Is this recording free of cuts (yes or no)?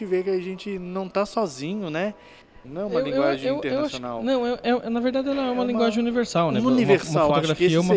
no